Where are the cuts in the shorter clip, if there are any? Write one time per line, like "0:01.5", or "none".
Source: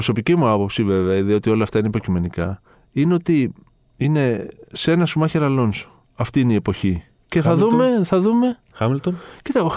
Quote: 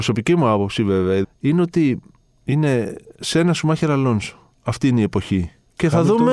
0:01.2